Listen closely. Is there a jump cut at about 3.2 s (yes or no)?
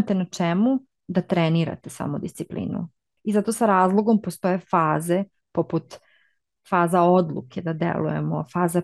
yes